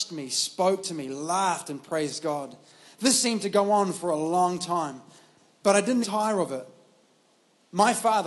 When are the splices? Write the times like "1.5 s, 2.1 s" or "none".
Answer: 6.0 s